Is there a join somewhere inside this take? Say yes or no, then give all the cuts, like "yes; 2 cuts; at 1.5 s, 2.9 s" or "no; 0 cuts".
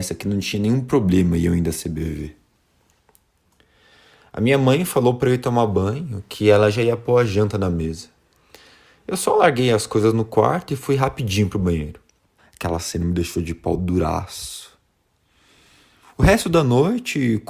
yes; 1 cut; at 12.4 s